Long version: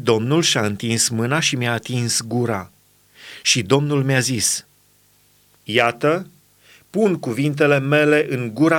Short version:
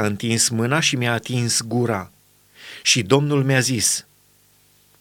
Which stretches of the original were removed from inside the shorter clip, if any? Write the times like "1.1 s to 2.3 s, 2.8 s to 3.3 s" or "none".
none